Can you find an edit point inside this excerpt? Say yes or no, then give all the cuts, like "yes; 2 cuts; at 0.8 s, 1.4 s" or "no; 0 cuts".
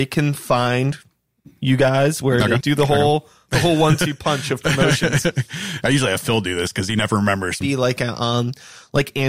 yes; 2 cuts; at 2.6 s, 7.6 s